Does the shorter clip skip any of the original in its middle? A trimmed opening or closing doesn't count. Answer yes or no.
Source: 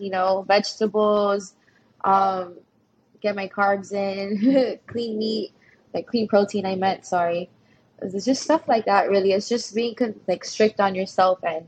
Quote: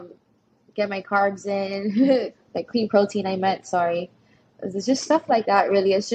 yes